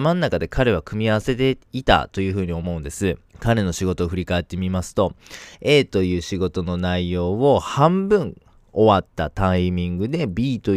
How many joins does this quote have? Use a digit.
1